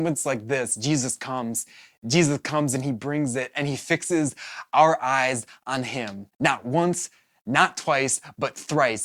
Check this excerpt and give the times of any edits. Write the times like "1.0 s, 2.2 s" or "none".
6.3 s